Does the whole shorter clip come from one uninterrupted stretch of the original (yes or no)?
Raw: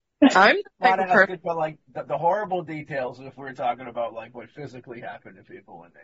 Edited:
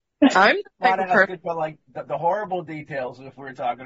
yes